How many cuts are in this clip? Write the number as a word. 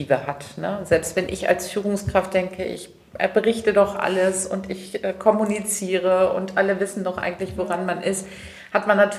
zero